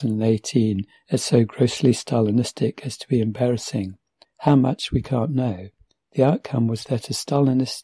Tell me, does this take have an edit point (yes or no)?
yes